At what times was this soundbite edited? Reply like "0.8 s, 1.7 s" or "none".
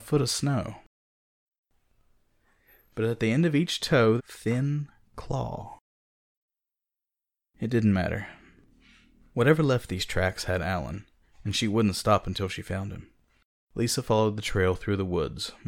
4.2 s

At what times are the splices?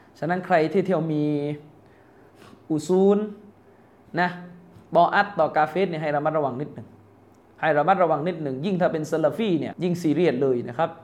9.7 s

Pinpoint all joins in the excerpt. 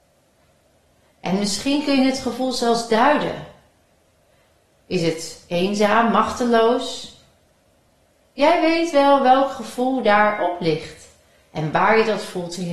4.8 s

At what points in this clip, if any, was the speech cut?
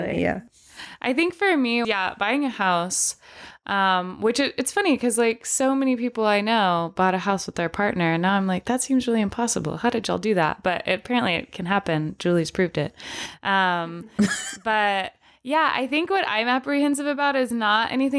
1.8 s

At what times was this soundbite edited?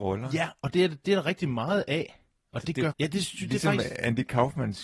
2.9 s

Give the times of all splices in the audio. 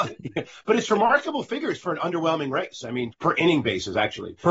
3.1 s

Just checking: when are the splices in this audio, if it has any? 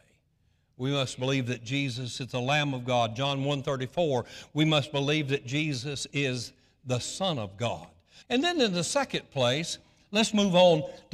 8.2 s

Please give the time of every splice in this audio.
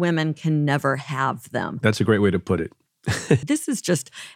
3.4 s

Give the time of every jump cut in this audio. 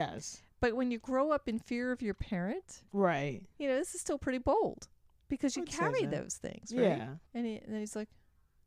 7.3 s

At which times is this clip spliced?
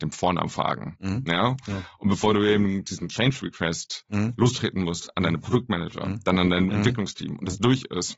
1.2 s

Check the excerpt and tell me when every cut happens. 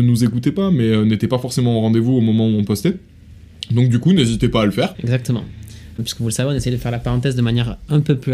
4.9 s, 6.0 s

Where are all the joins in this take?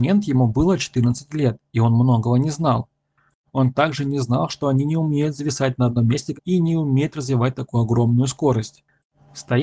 3.5 s, 6.3 s

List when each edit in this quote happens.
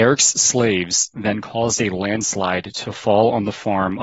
none

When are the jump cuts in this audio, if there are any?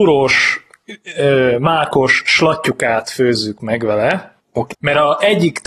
4.7 s

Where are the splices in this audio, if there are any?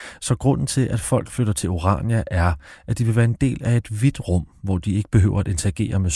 none

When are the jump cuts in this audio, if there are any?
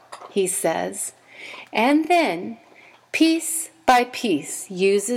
none

